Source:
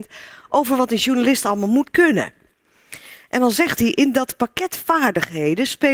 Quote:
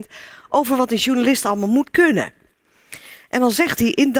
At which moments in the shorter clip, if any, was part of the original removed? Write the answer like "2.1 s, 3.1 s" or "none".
none

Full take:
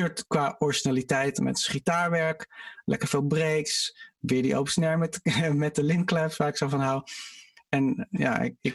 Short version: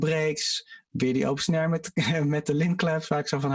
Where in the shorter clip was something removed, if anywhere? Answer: none

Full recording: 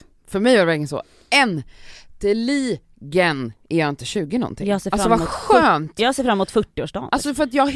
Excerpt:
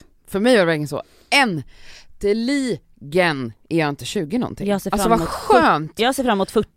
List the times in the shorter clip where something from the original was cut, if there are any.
none

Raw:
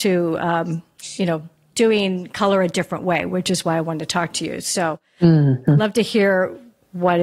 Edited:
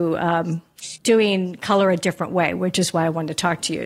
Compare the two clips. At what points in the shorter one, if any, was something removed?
1.0 s

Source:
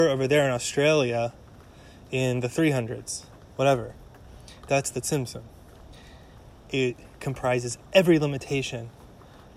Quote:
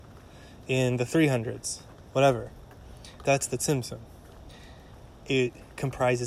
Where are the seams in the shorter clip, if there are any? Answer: none

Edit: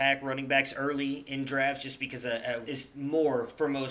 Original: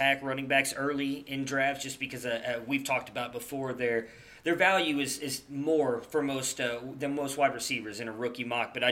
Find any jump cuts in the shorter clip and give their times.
2.6 s

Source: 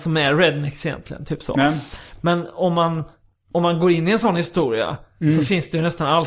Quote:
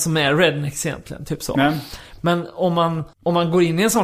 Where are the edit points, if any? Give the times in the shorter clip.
3.1 s

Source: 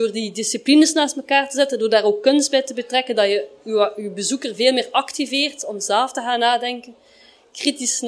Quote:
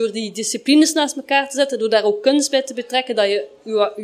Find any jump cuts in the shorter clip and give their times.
none

